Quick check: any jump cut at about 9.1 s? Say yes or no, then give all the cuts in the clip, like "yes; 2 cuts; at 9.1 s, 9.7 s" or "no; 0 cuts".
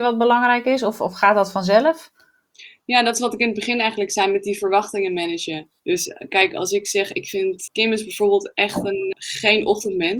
yes; 3 cuts; at 5.8 s, 7.7 s, 9.1 s